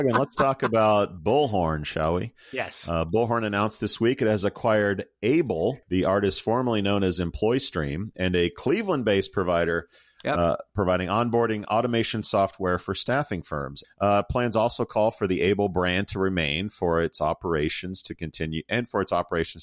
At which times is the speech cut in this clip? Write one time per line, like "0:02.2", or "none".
0:05.8
0:13.8